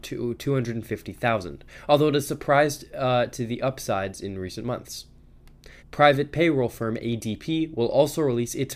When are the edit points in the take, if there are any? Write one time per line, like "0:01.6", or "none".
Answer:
0:05.8